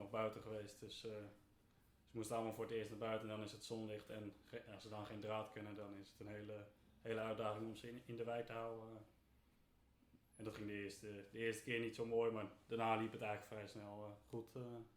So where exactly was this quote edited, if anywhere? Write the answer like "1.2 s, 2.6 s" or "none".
none